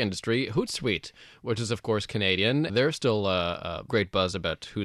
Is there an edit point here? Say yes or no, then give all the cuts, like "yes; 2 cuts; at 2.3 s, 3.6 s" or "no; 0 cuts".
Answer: yes; 2 cuts; at 2.7 s, 3.9 s